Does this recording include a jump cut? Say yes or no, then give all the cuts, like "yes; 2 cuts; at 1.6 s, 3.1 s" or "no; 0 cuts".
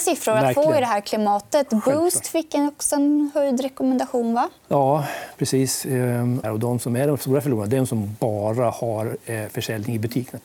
yes; 1 cut; at 6.4 s